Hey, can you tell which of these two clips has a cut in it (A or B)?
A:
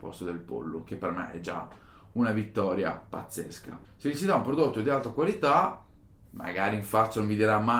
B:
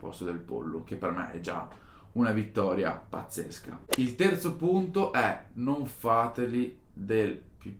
A